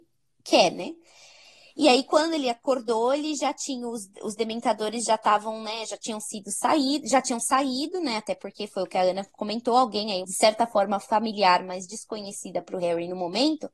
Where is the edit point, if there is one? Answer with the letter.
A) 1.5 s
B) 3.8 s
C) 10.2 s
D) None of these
C